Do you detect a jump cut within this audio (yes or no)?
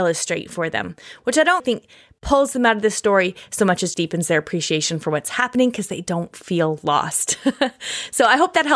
yes